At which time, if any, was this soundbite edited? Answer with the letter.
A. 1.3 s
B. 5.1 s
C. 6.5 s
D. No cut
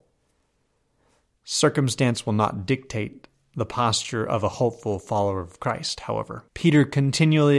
C